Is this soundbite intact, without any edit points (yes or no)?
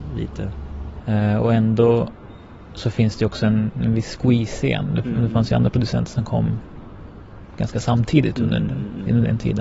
no